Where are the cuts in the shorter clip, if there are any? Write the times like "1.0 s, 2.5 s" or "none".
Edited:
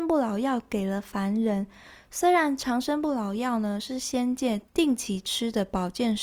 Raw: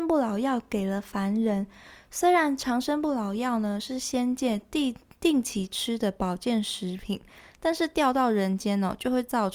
4.7 s